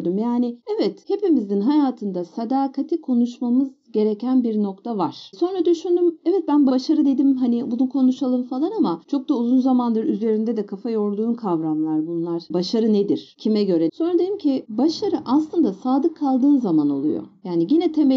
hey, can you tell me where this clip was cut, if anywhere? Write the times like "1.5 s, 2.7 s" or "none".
6.7 s, 13.9 s